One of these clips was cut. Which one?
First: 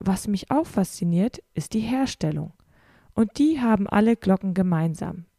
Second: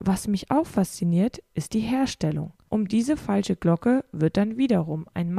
second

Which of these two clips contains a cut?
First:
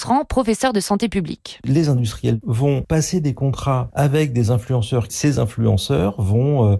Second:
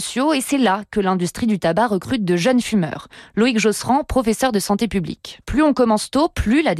second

